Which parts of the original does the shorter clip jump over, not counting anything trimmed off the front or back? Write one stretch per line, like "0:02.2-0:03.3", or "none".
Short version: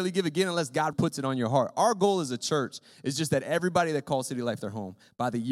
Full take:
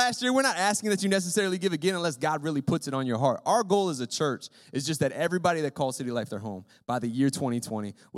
0:02.4-0:02.6